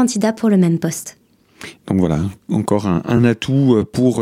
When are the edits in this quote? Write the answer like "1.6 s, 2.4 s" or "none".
none